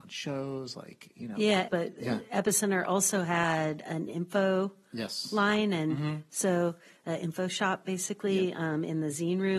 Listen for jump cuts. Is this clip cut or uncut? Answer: cut